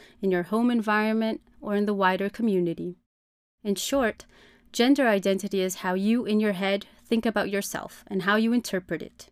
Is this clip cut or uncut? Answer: uncut